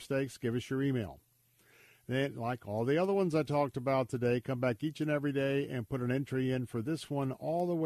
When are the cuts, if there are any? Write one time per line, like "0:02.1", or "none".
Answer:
none